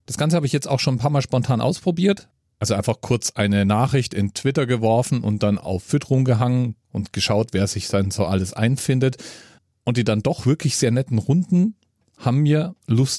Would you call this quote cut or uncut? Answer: uncut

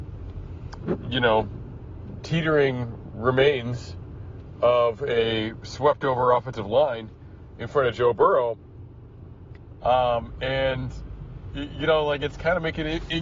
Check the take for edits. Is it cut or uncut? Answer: cut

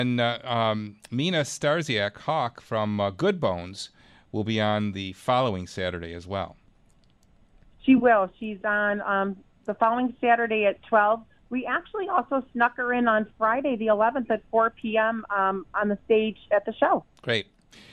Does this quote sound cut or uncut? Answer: uncut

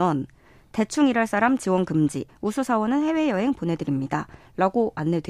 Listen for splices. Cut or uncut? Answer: cut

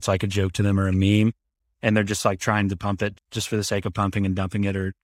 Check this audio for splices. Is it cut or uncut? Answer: cut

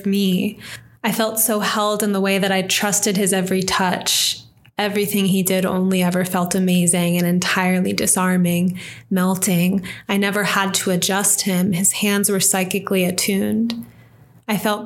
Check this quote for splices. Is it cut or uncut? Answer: uncut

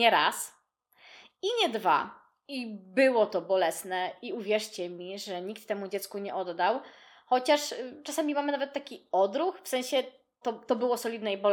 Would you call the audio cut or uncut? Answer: cut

